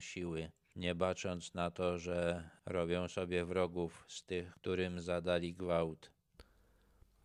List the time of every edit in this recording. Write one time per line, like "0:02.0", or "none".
0:04.5

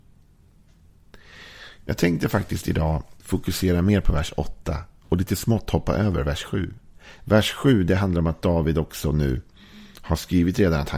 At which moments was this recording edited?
0:03.2
0:07.2

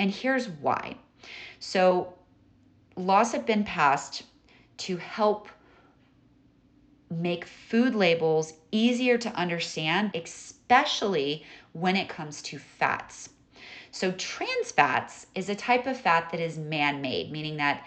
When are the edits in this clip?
0:10.1

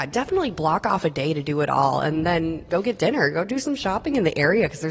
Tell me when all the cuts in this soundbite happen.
0:02.7

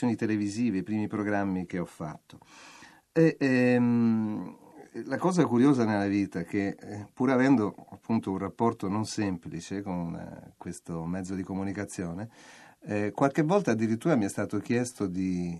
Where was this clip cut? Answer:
0:01.7

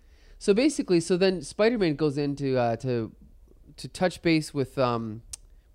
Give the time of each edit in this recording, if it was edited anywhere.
none

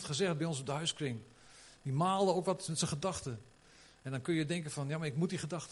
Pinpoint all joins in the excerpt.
none

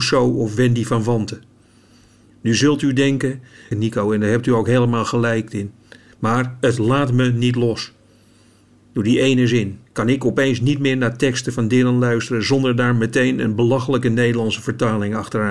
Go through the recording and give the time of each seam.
0:03.7
0:09.9

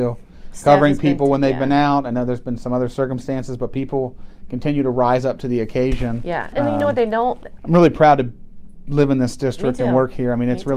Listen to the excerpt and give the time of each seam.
0:06.5
0:07.6

